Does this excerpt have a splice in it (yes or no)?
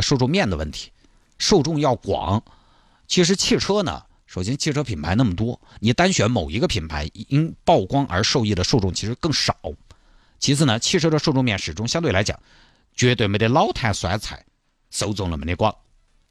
no